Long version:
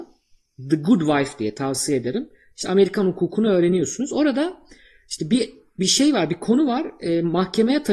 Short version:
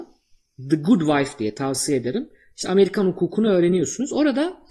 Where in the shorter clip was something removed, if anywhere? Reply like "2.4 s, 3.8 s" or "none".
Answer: none